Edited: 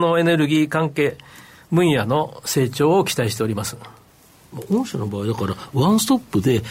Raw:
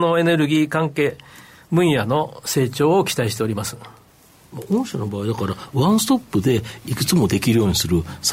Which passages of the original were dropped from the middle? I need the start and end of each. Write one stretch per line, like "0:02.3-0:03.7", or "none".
none